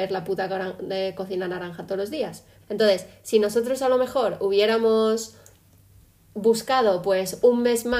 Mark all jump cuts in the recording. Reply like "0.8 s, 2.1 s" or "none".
2.6 s